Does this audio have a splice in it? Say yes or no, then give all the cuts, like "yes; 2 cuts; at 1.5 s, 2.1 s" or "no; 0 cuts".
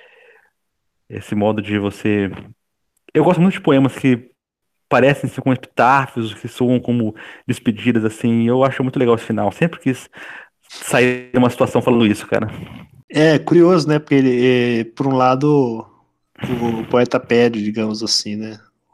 yes; 1 cut; at 9.5 s